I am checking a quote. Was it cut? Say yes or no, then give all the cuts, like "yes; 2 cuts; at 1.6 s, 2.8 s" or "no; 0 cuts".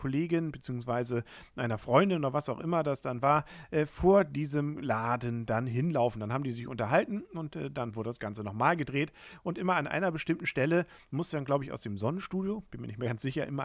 no; 0 cuts